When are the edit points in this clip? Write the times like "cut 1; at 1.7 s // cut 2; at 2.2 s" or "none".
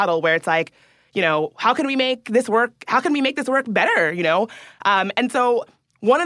none